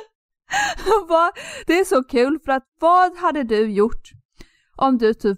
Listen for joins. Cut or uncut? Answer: uncut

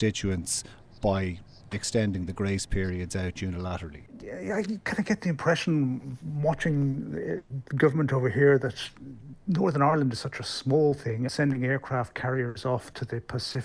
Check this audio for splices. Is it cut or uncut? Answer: cut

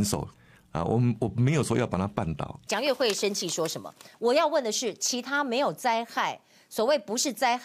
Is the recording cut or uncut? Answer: cut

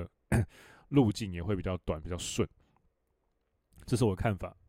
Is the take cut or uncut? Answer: uncut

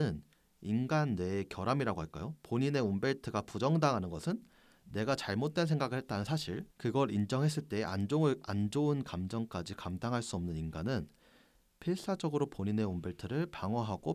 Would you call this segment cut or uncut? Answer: cut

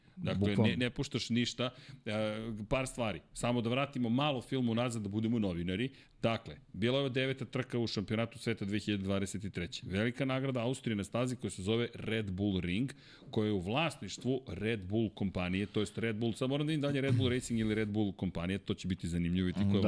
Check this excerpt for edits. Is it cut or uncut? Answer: uncut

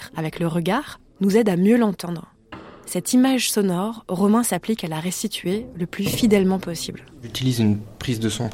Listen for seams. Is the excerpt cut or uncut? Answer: uncut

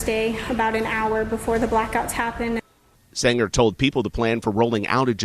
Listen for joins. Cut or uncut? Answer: uncut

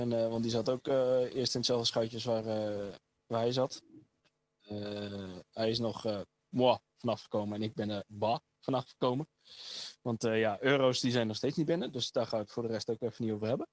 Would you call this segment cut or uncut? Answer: uncut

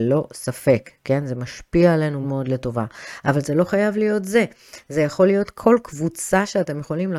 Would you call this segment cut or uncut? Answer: cut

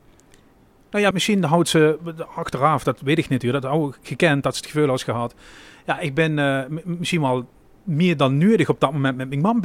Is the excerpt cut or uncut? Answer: cut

